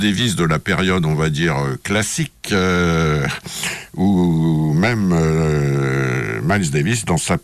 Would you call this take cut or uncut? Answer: uncut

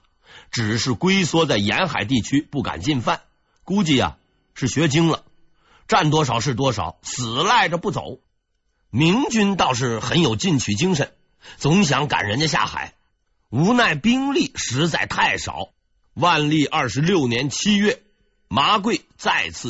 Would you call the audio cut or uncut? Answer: cut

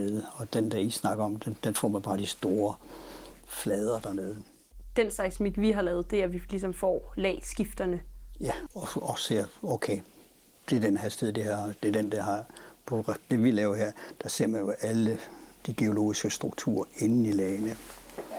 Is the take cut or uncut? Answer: cut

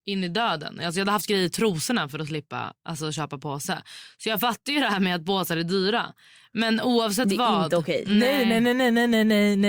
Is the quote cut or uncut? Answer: uncut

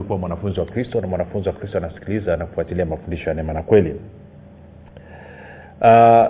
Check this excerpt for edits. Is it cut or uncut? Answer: uncut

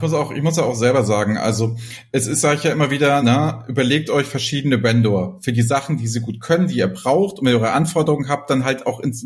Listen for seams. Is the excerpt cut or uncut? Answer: uncut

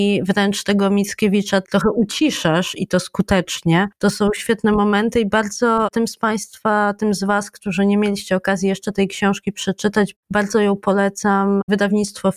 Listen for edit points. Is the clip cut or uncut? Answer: uncut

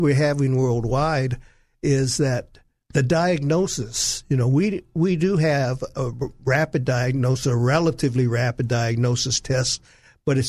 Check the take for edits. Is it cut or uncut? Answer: uncut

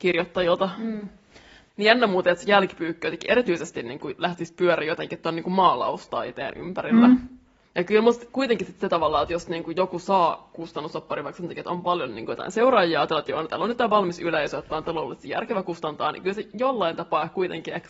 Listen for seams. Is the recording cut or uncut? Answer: cut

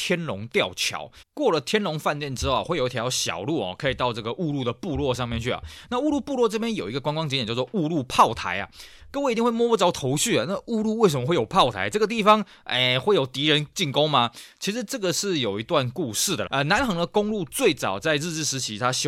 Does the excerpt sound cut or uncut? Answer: cut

